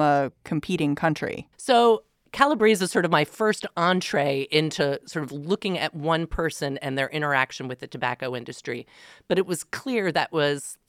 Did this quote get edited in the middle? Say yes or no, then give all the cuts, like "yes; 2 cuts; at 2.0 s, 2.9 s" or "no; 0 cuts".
yes; 1 cut; at 1.5 s